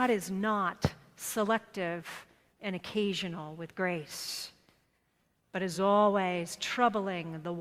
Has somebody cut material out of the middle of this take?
no; 0 cuts

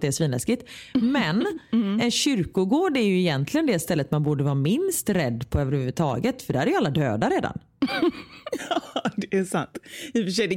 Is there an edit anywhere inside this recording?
no; 0 cuts

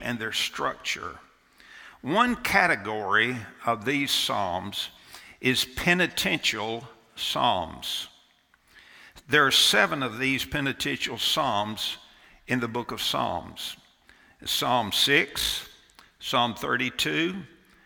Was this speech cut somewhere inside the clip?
no; 0 cuts

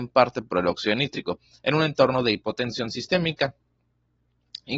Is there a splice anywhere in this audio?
yes; 1 cut; at 1.6 s

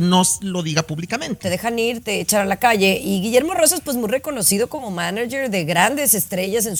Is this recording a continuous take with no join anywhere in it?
no; 1 cut; at 1.4 s

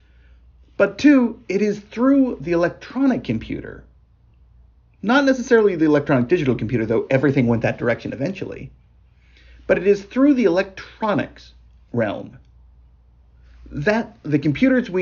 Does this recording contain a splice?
no; 0 cuts

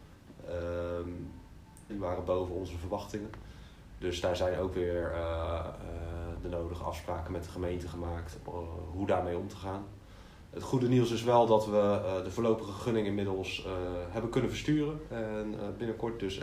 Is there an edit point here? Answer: yes; 1 cut; at 1.9 s

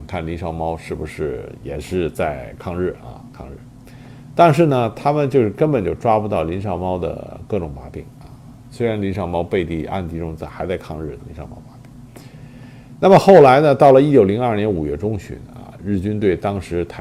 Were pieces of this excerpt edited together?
yes; 1 cut; at 11.2 s

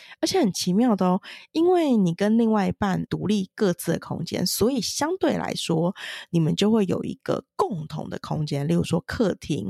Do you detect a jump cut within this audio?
yes; 1 cut; at 3.1 s

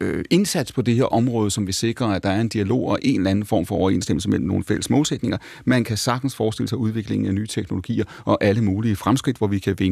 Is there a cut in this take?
no; 0 cuts

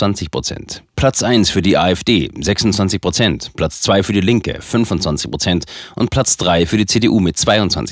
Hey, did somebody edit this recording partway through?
yes; 1 cut; at 0.9 s

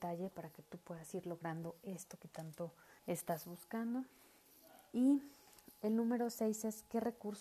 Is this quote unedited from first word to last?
no; 1 cut; at 3.0 s

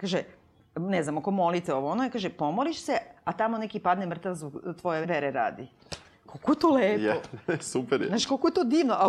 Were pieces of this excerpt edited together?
yes; 1 cut; at 5.0 s

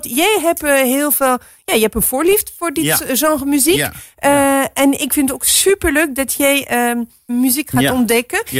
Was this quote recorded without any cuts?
no; 1 cut; at 7.3 s

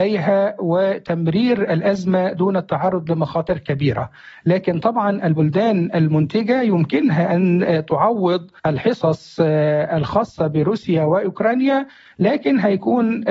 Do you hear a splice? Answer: yes; 1 cut; at 8.6 s

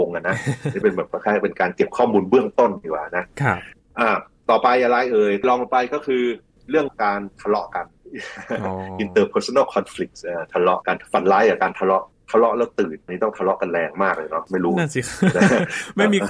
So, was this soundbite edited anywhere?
no; 0 cuts

